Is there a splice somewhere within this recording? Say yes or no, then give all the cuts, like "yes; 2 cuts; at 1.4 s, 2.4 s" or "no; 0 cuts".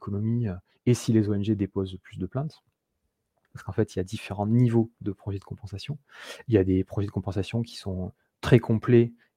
yes; 1 cut; at 3.4 s